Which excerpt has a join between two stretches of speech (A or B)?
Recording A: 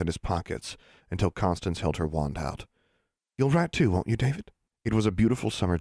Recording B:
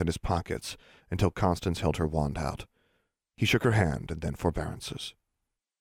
A